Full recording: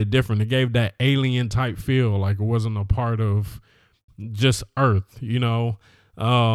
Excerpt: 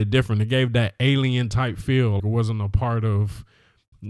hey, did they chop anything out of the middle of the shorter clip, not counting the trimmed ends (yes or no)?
yes